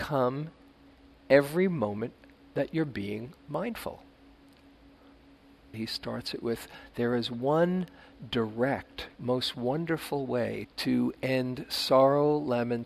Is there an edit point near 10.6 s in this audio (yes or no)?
yes